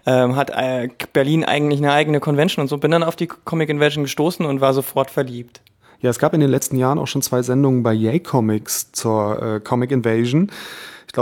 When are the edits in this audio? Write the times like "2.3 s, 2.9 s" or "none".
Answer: none